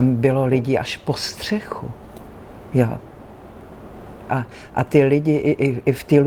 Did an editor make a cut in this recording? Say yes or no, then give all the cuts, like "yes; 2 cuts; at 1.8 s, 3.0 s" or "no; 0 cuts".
yes; 1 cut; at 4.3 s